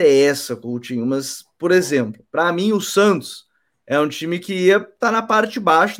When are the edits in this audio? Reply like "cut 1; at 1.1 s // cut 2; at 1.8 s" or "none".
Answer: none